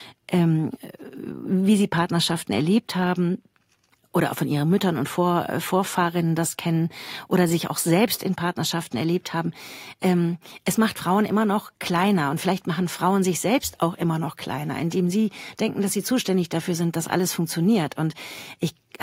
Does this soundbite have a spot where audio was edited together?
no; 0 cuts

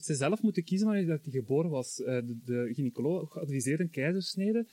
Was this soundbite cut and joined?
no; 0 cuts

